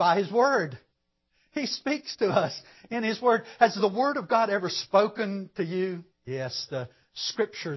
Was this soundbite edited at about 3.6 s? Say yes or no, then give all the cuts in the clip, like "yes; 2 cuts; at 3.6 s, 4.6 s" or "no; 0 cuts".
no; 1 cut; at 6.1 s